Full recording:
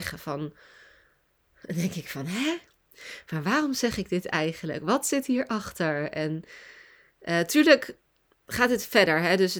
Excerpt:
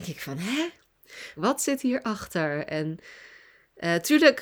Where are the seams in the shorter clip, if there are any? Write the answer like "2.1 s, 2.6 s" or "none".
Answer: 1.4 s